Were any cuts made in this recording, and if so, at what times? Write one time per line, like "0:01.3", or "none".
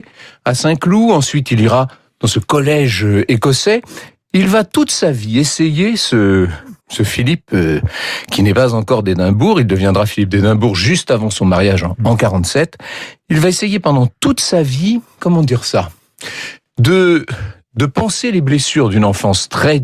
0:06.8